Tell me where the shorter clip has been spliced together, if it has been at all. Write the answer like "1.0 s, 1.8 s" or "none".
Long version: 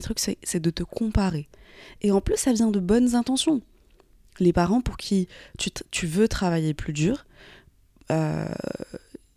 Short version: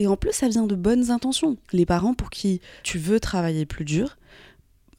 1.6 s, 2.8 s